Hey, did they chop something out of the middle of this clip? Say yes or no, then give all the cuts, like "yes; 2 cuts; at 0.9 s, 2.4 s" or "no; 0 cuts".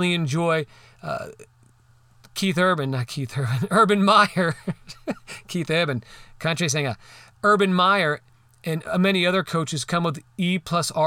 no; 0 cuts